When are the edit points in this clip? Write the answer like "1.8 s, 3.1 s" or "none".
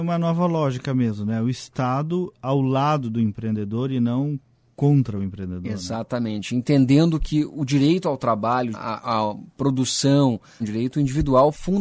8.7 s, 10.6 s